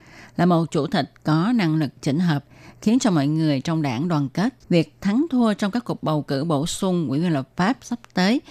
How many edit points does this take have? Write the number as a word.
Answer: one